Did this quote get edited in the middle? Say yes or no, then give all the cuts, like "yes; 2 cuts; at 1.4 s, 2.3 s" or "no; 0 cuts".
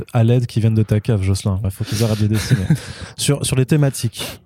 yes; 1 cut; at 1.6 s